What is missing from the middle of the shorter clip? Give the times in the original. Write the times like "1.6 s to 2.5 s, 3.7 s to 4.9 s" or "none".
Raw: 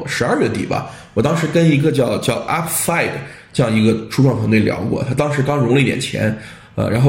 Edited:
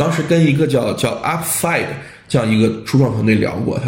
none